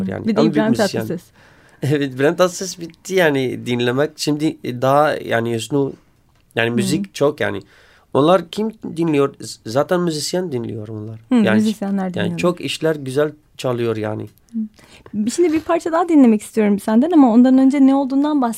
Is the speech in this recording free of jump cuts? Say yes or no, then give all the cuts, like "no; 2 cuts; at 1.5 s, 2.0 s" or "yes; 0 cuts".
yes; 0 cuts